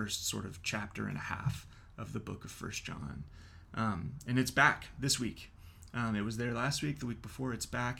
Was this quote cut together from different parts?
no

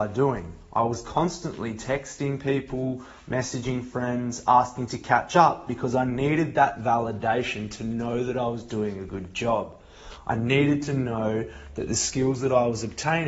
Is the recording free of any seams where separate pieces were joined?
yes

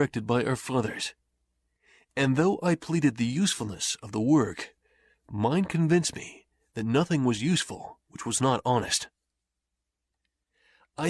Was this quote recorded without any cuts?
yes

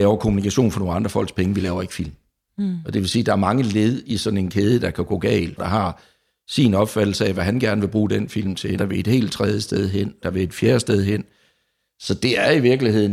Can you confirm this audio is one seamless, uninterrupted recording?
no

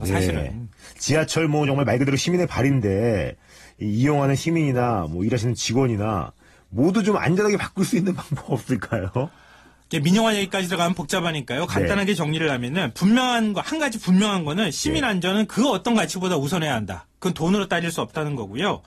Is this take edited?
no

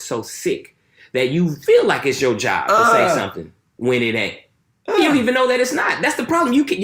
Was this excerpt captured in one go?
yes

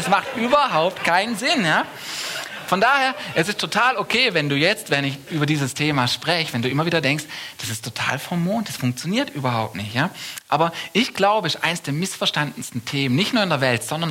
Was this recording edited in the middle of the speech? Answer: no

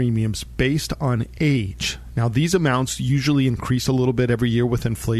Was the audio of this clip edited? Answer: no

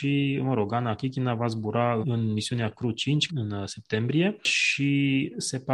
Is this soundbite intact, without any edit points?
no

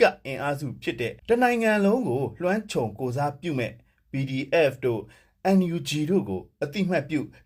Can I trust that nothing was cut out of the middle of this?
no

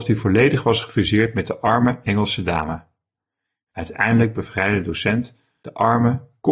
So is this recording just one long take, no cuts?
no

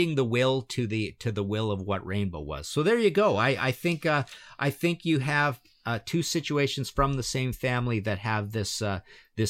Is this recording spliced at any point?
no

